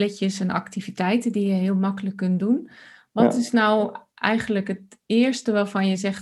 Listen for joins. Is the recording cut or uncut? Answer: uncut